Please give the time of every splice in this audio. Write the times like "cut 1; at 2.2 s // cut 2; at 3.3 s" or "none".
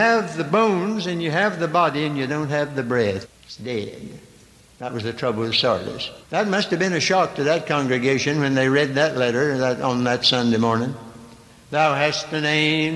cut 1; at 3.2 s // cut 2; at 6.2 s